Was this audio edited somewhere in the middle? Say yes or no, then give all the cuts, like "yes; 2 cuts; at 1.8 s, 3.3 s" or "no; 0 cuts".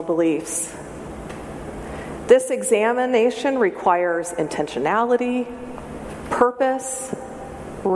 no; 0 cuts